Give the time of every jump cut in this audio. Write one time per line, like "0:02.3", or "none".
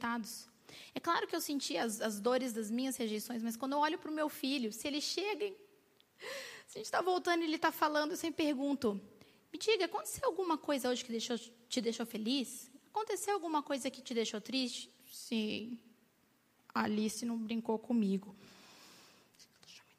none